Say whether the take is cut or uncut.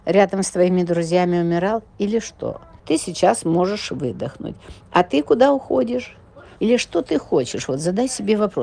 cut